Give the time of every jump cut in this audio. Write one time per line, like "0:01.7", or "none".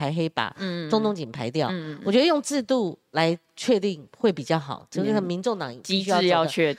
none